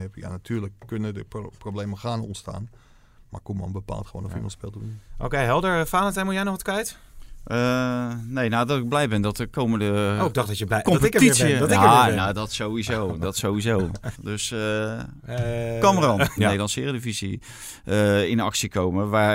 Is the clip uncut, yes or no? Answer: no